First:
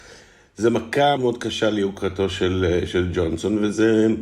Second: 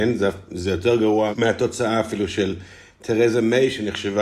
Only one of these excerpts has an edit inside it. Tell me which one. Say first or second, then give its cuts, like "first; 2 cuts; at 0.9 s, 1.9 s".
first; 1 cut; at 1.2 s